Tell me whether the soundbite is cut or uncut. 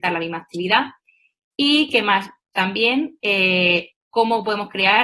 uncut